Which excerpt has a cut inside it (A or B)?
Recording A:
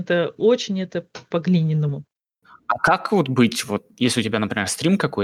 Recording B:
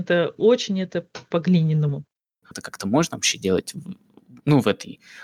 B